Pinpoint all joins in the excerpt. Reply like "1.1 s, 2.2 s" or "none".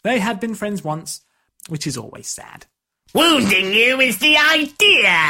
1.5 s, 3.0 s